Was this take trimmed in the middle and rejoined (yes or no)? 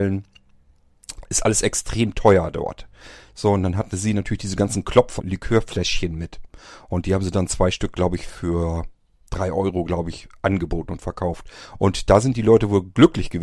yes